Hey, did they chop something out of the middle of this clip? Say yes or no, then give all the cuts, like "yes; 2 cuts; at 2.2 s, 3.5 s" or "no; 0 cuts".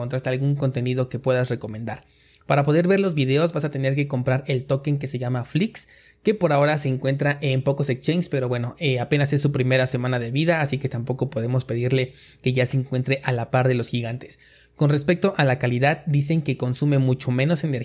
no; 0 cuts